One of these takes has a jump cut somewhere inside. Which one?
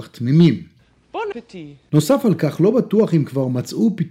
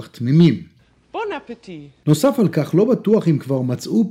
first; 1 cut; at 1.3 s

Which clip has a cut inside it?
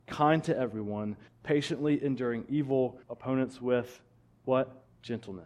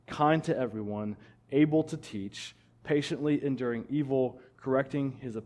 first; 2 cuts; at 1.3 s, 3.0 s

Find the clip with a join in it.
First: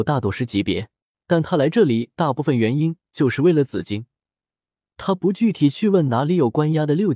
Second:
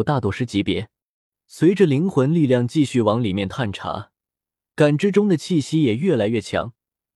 first; 1 cut; at 1.1 s

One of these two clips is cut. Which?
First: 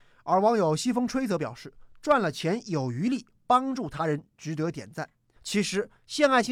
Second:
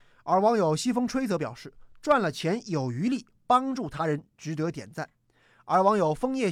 first; 1 cut; at 5.4 s

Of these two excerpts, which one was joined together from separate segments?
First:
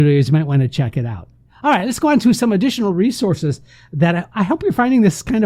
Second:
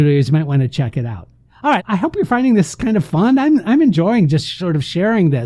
second; 1 cut; at 1.8 s

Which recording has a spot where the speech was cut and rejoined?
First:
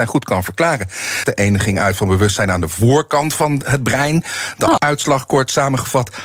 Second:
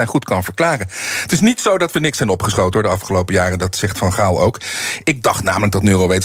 first; 2 cuts; at 1.2 s, 4.8 s

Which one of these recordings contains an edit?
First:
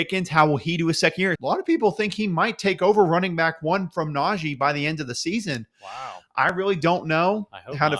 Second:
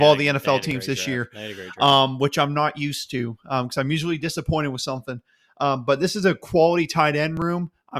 first; 1 cut; at 1.4 s

